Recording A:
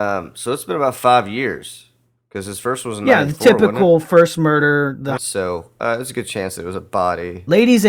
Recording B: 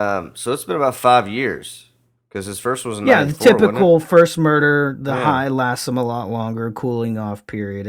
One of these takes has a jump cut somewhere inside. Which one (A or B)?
A